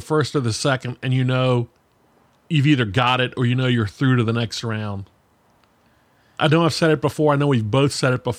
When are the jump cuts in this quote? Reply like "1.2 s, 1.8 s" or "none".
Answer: 6.4 s